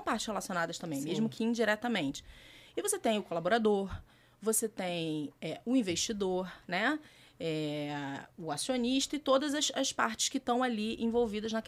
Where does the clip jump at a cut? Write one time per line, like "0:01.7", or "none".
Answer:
none